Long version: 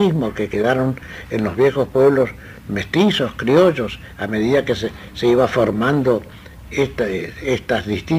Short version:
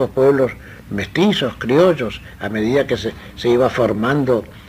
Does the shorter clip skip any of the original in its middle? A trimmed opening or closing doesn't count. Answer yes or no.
no